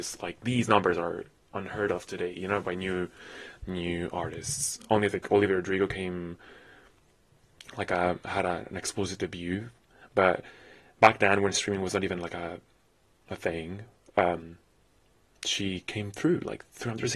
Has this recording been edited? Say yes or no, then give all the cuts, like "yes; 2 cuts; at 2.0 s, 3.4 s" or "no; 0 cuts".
no; 0 cuts